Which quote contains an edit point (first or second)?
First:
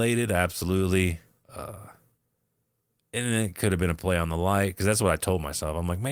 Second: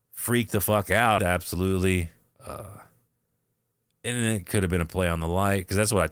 second